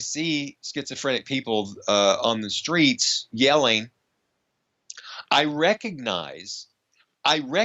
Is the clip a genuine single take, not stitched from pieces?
yes; 0 cuts

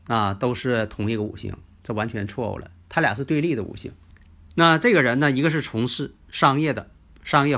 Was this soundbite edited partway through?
no; 0 cuts

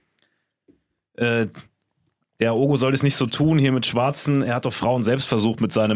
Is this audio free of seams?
yes; 0 cuts

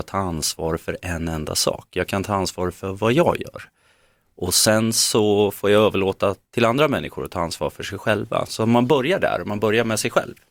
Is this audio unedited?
yes; 0 cuts

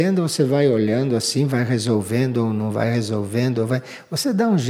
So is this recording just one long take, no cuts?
yes; 0 cuts

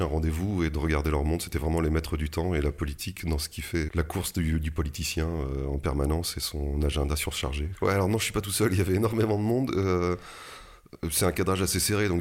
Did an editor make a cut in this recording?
yes; 2 cuts; at 3.9 s, 7.7 s

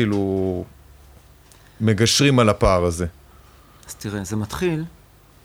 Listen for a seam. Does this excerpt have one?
no; 0 cuts

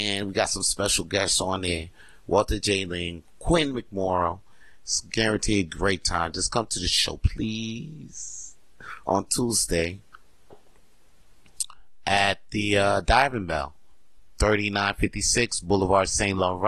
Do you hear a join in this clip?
no; 0 cuts

